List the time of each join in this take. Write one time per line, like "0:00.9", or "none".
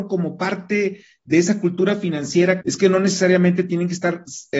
0:02.6